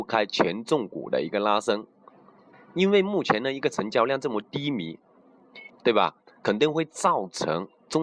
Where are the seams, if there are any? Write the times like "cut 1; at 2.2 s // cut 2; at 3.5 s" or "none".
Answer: cut 1; at 2.5 s // cut 2; at 5.7 s